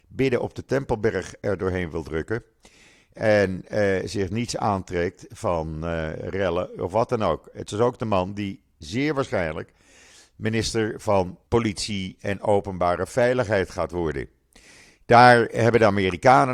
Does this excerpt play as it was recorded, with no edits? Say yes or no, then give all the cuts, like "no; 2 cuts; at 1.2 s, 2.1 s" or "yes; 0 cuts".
no; 1 cut; at 11.5 s